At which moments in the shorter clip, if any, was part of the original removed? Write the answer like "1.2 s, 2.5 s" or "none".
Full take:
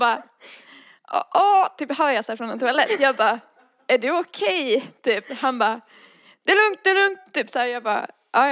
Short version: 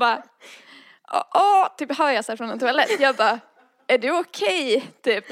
none